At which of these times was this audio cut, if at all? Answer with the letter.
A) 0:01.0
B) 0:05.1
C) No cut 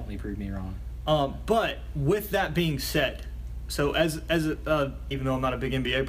B